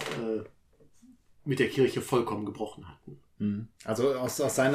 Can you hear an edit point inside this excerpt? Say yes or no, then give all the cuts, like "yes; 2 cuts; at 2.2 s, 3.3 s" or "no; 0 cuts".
no; 0 cuts